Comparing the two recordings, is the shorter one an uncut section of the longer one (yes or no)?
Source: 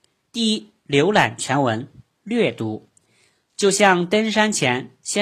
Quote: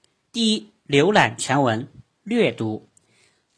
yes